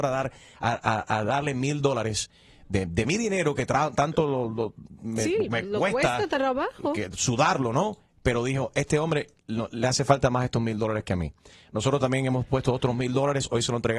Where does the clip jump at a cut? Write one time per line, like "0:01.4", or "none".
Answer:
none